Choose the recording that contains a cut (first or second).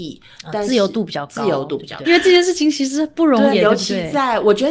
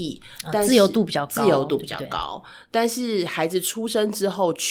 first